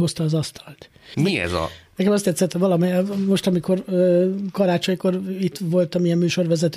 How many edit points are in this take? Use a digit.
1